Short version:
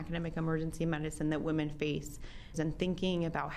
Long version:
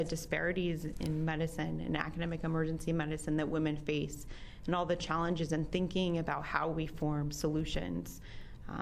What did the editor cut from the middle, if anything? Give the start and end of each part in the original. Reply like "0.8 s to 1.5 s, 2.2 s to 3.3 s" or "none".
4.6 s to 5.5 s